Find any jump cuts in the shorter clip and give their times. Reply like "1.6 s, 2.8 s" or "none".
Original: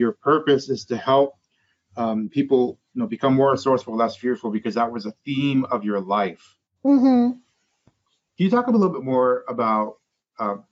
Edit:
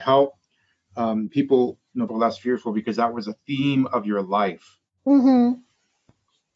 2.1 s

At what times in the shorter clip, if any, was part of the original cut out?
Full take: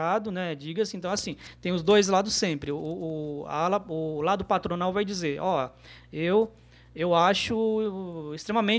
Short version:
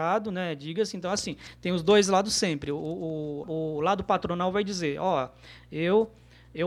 3.4 s

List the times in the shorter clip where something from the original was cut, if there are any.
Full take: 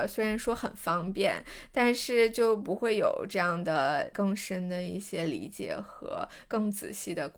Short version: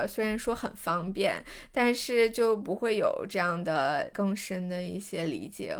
none

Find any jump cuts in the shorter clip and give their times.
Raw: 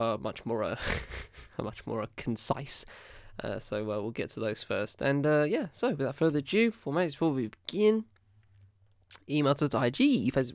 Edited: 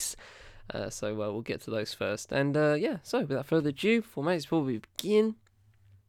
none

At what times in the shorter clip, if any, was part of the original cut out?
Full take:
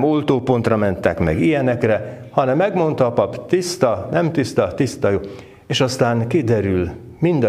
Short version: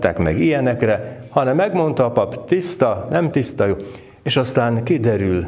3.3 s

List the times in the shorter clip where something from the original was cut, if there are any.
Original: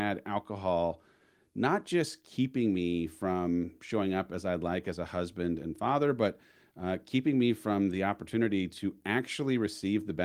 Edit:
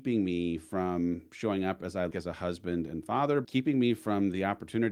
2.1 s, 3.4 s

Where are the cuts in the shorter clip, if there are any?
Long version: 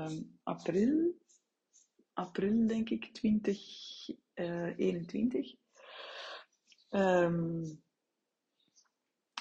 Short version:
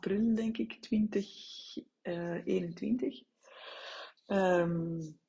4.2 s

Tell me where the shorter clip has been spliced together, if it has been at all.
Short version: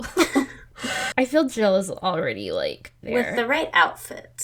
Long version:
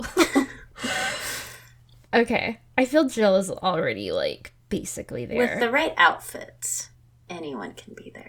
1.1 s, 3.0 s

